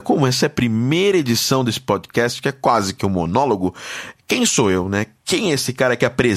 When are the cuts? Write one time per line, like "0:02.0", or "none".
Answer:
none